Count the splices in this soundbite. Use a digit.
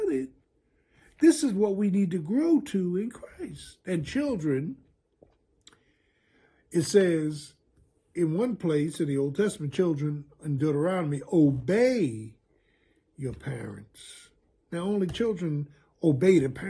0